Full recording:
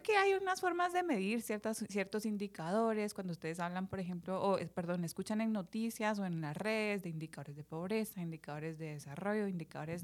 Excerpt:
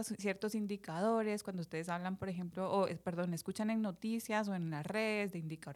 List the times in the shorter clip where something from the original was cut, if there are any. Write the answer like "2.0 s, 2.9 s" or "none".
none